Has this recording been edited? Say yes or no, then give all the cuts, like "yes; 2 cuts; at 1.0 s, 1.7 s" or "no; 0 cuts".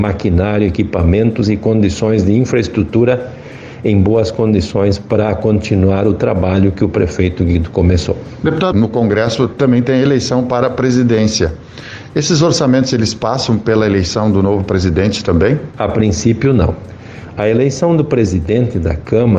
yes; 1 cut; at 8.7 s